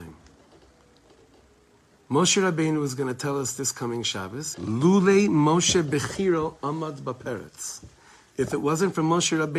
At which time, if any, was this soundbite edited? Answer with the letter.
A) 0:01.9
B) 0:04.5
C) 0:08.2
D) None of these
B